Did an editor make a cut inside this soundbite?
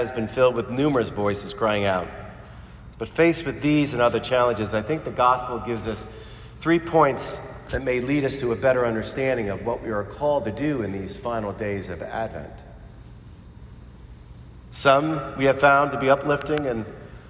yes; 2 cuts; at 2.9 s, 14.7 s

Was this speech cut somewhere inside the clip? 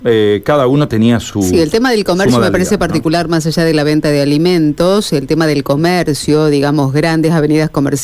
no; 0 cuts

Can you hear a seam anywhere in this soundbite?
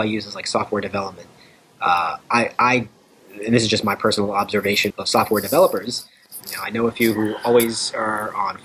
yes; 2 cuts; at 4.9 s, 6.4 s

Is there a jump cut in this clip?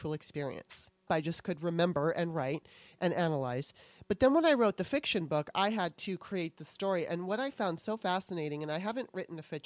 yes; 1 cut; at 1.1 s

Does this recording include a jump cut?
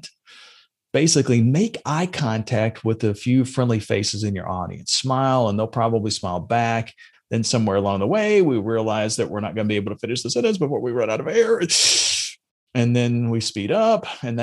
yes; 1 cut; at 7.1 s

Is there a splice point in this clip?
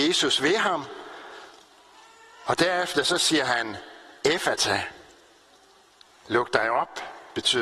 no; 0 cuts

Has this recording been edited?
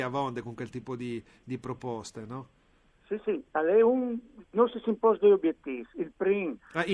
no; 0 cuts

